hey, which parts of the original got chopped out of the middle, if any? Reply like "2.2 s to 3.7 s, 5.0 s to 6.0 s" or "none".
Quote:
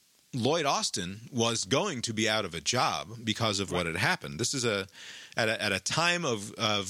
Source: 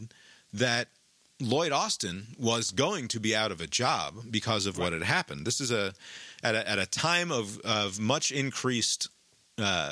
none